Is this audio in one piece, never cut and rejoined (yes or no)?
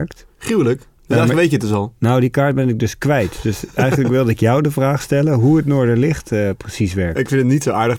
yes